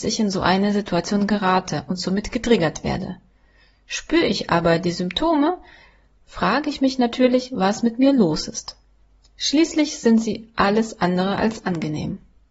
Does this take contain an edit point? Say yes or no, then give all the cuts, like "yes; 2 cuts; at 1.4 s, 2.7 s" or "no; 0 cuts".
no; 0 cuts